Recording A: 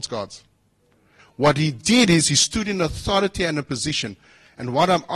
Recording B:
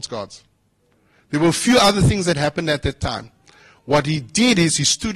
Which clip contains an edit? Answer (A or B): A